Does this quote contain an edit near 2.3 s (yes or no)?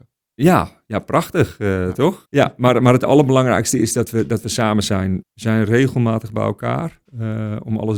yes